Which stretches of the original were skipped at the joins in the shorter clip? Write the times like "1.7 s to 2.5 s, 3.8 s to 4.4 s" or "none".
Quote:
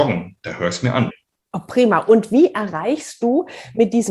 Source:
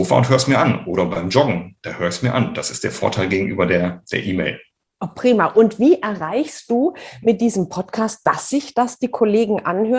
2.5 s to 4.6 s

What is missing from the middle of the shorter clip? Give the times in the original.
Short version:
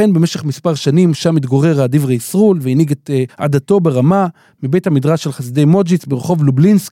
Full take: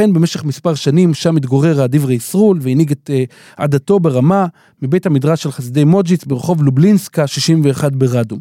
3.3 s to 3.5 s

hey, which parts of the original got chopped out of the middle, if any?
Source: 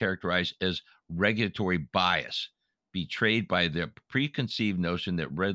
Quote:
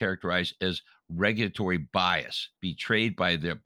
2.6 s to 2.9 s

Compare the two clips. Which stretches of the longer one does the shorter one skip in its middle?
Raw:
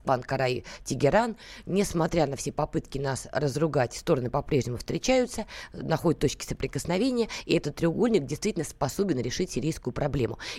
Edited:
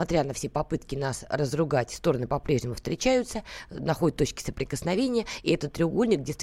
none

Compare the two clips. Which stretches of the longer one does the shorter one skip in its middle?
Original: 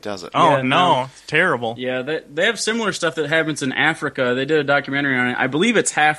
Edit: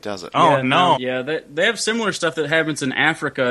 1.0 s to 1.8 s

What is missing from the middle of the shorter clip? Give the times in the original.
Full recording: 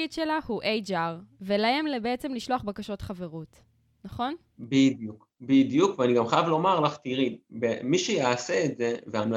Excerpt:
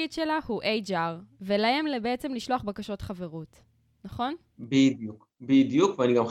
none

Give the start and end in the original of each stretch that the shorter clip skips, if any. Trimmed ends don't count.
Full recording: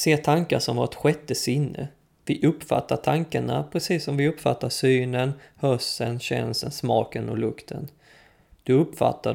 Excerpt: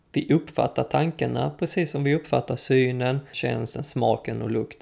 5.5 s to 6.2 s

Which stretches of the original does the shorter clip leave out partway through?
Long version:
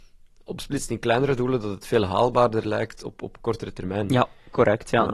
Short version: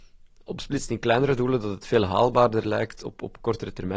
none

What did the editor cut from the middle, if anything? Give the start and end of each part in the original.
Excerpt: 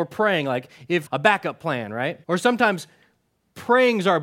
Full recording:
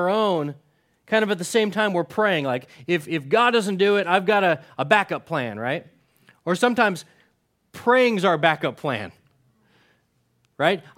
3.1 s to 4.7 s, 5.9 s to 6.4 s

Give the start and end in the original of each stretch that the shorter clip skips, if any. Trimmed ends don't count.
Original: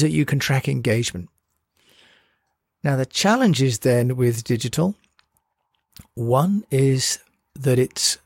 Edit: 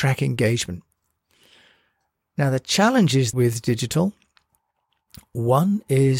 3.8 s to 4.2 s

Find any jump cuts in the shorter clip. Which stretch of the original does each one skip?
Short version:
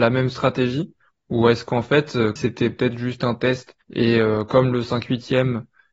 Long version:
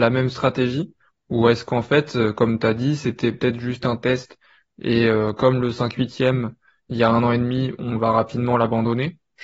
2.4 s to 3.0 s, 4.4 s to 4.7 s

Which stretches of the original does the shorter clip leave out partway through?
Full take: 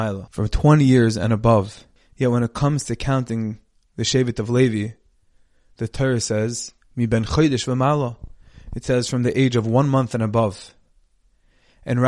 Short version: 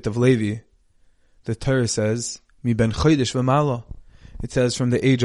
none

